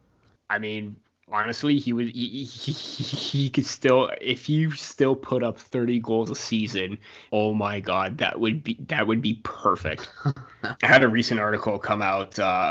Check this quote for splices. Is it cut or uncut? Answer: cut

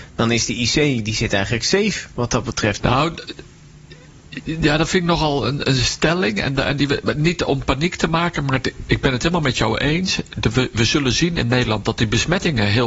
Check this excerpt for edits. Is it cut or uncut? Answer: cut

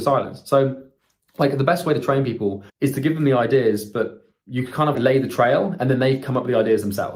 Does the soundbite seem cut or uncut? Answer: cut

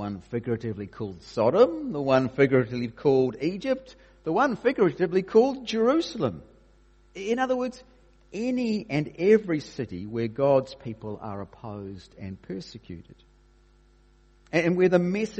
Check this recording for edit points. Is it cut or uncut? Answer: uncut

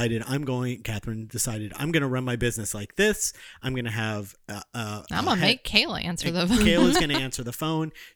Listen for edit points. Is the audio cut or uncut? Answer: uncut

